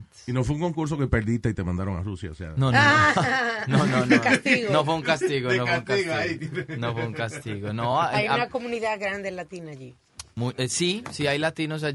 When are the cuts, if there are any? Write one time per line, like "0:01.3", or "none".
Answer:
none